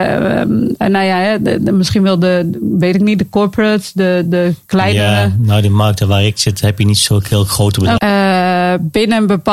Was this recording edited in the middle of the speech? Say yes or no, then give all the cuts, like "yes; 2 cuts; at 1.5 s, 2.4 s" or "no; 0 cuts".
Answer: yes; 1 cut; at 8.0 s